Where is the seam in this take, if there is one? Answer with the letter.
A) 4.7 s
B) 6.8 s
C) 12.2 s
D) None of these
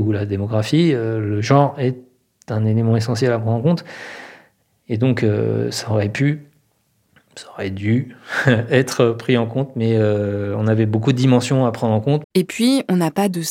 C